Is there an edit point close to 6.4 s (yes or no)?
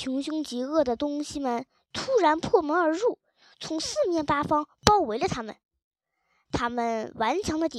no